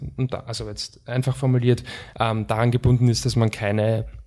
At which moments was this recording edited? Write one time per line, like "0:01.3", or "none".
none

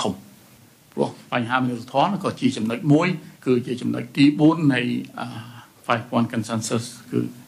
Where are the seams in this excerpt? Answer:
0:03.3

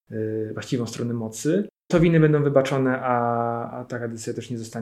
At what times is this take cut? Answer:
0:03.7

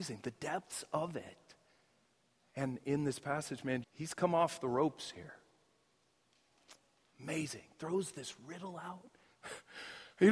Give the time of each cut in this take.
0:03.8
0:07.1

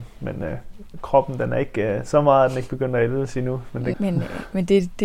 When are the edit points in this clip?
0:03.9

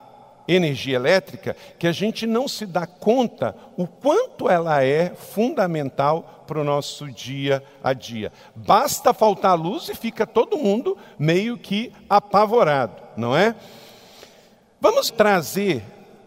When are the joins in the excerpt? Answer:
0:15.1

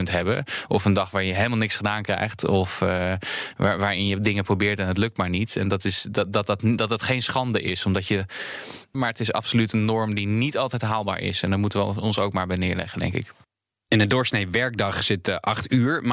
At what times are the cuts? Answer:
0:08.9

